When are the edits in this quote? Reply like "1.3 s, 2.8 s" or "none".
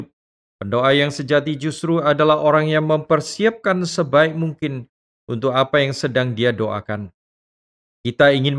none